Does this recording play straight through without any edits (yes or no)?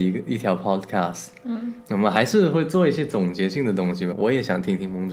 no